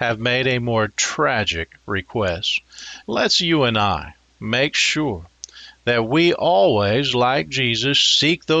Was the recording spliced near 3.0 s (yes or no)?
yes